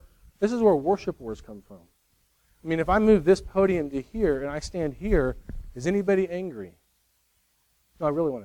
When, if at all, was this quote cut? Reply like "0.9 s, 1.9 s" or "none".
none